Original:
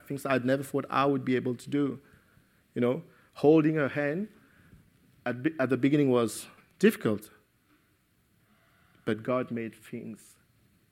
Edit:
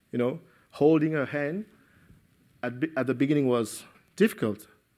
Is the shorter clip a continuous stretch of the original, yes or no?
yes